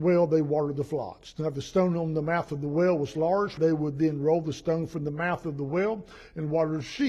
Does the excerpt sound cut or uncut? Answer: cut